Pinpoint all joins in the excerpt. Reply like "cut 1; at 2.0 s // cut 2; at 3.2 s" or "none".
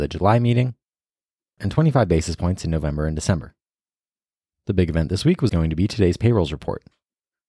cut 1; at 1.6 s // cut 2; at 5.5 s